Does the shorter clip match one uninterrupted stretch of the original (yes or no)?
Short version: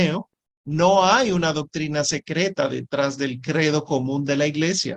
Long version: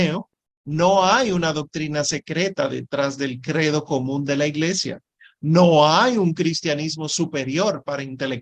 yes